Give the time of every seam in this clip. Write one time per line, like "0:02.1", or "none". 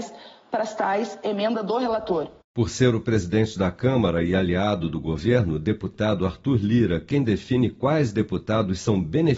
0:02.4